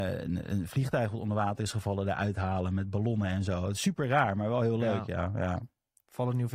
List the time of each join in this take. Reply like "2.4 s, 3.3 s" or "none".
none

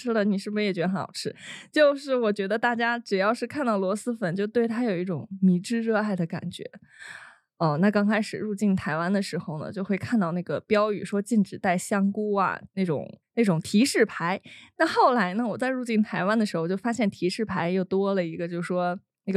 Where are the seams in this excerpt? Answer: none

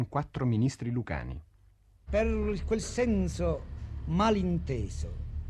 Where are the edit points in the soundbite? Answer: 2.0 s

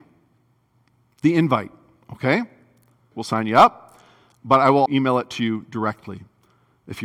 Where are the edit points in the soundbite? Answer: 3.1 s, 4.9 s

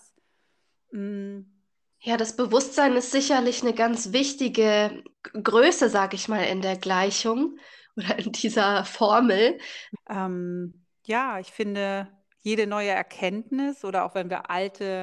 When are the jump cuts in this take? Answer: 1.9 s, 5.1 s, 9.9 s

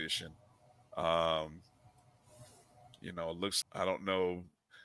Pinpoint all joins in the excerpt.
3.6 s

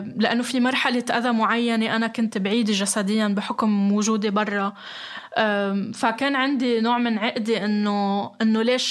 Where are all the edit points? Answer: none

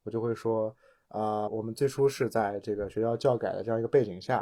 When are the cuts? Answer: 1.5 s

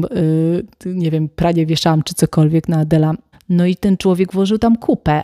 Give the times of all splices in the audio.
3.3 s

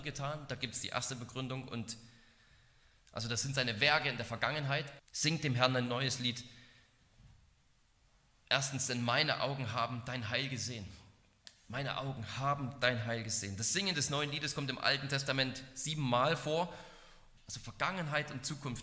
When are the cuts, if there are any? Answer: 5.0 s, 17.4 s

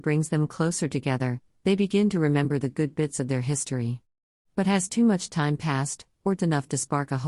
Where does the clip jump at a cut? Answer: 6.4 s

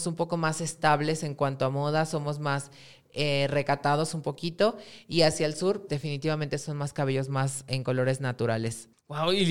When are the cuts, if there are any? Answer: 5.9 s

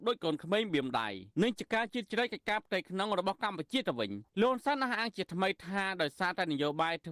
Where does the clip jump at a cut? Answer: 1.3 s, 4.3 s

